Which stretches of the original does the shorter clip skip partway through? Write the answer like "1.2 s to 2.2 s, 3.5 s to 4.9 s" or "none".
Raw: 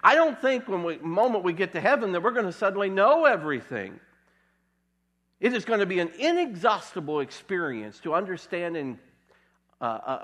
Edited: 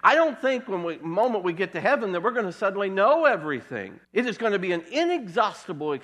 4.0 s to 5.3 s